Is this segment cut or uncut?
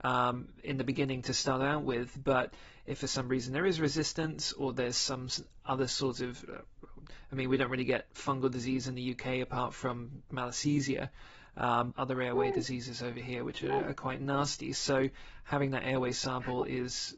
cut